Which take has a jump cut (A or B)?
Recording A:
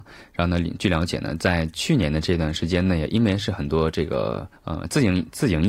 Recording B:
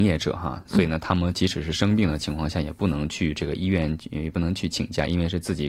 A